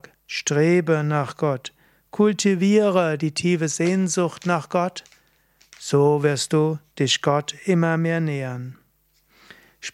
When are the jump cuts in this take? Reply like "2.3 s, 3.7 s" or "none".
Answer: none